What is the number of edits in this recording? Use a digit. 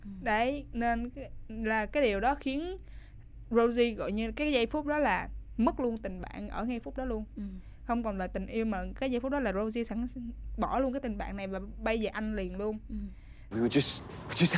1